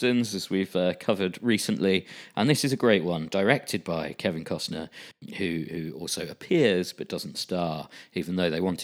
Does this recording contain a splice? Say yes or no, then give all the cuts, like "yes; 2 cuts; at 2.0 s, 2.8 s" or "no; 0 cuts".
no; 0 cuts